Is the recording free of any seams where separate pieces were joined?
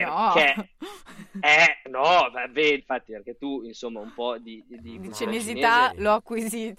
no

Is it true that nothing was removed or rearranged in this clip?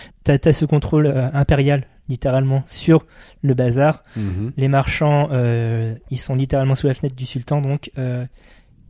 yes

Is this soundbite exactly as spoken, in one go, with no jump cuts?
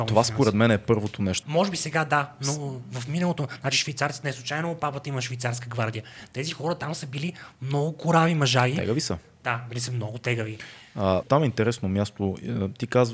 no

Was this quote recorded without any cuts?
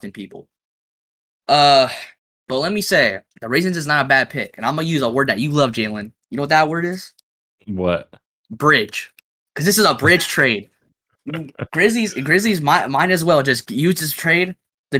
no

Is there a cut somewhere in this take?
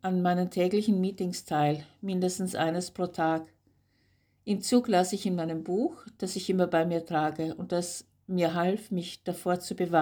no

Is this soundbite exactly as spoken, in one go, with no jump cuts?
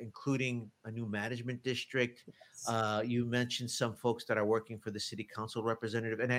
yes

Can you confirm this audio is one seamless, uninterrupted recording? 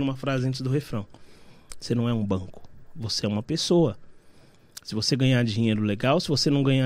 no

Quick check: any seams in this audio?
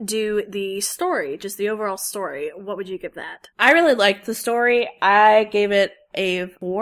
yes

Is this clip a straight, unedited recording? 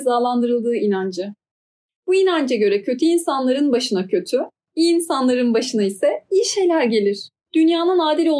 yes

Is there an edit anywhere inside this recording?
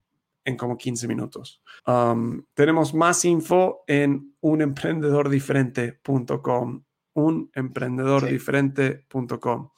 yes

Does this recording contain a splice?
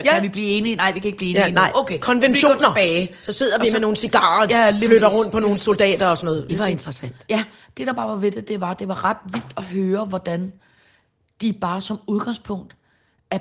yes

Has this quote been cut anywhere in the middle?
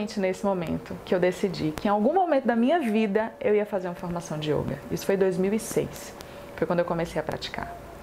no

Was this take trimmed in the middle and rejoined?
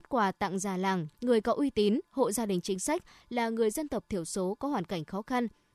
yes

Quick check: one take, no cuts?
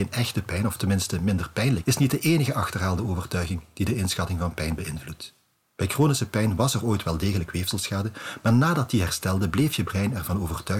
no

